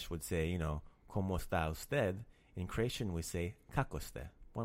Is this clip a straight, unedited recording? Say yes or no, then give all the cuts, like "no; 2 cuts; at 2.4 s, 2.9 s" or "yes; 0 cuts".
yes; 0 cuts